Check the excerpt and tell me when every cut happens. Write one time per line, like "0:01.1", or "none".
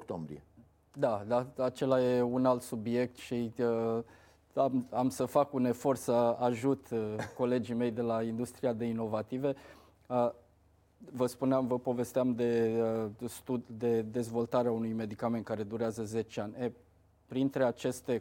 none